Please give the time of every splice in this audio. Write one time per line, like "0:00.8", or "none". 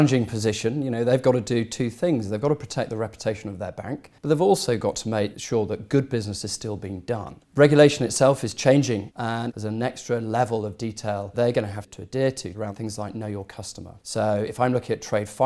0:04.2